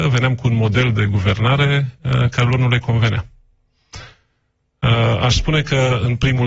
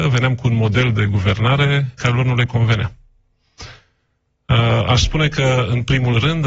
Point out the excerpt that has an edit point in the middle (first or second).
second